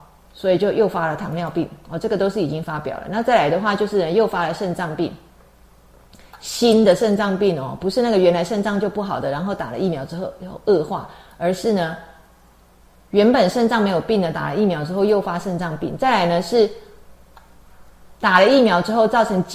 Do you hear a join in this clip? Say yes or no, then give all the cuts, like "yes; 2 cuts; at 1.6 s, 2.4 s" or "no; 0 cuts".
no; 0 cuts